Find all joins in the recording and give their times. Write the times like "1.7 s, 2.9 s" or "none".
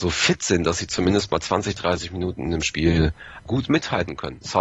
3.5 s